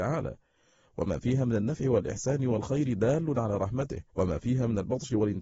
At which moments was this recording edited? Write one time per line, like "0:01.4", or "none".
0:04.1